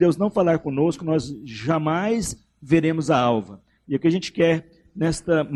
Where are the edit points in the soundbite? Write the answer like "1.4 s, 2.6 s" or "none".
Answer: 3.8 s